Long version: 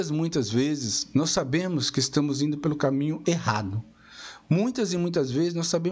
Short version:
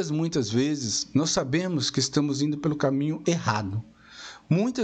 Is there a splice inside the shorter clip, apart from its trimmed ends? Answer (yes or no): no